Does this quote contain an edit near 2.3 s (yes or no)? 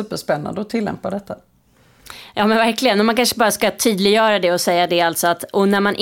no